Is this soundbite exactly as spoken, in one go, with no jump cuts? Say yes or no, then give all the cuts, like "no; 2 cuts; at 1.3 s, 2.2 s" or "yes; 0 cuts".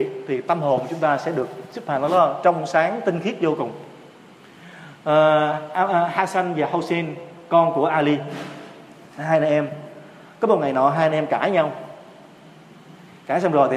yes; 0 cuts